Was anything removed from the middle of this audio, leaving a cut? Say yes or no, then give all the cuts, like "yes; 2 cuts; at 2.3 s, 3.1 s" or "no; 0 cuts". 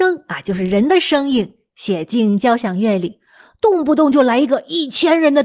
no; 0 cuts